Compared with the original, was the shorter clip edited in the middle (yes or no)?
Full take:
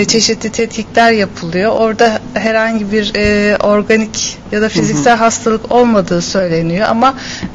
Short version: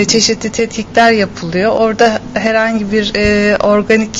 no